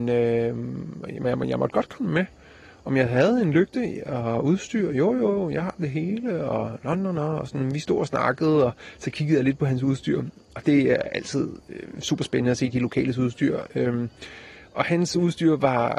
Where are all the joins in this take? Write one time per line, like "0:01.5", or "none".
none